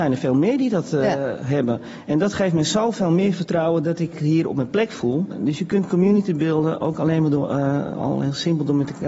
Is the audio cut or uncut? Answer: uncut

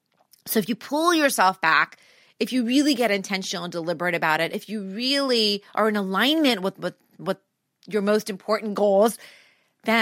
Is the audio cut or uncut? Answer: uncut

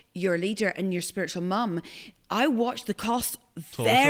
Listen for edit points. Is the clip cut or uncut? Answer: uncut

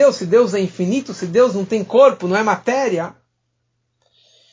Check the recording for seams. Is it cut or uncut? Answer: uncut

